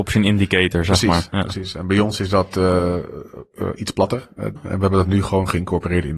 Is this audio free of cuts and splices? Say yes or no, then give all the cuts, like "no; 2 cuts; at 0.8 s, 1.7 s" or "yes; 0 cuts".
no; 1 cut; at 4.6 s